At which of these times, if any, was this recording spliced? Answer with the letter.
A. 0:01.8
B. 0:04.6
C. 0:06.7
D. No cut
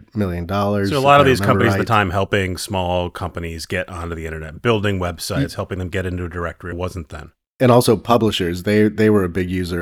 C